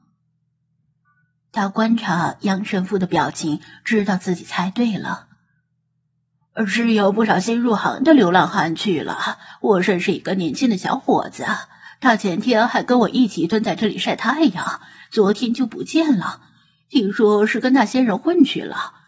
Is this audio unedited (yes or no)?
yes